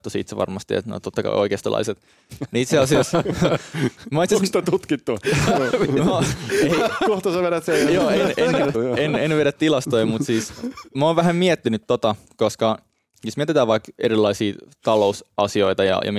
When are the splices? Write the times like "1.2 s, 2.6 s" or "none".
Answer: 8.7 s